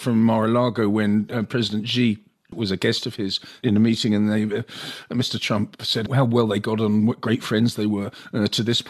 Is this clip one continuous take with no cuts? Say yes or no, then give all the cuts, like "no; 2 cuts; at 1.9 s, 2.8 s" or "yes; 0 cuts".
yes; 0 cuts